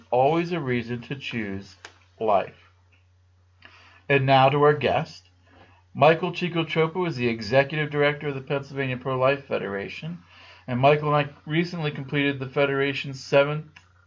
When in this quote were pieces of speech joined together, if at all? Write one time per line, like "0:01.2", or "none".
none